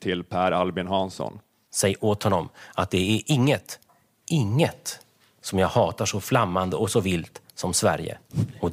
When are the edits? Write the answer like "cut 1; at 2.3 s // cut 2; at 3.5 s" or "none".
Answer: cut 1; at 4.2 s